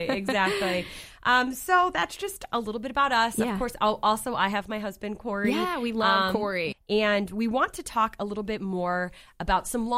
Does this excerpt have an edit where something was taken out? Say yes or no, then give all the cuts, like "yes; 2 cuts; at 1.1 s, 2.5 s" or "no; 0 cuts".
yes; 1 cut; at 6.7 s